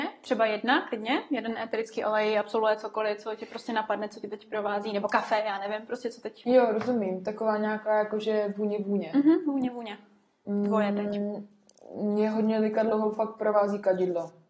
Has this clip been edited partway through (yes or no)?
no